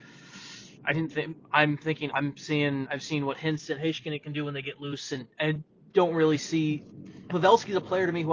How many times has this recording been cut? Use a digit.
2